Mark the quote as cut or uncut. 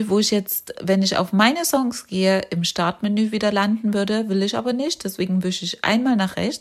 uncut